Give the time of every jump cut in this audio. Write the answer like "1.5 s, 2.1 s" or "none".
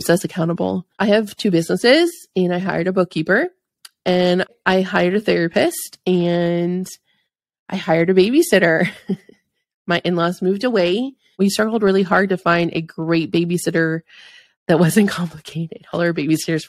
none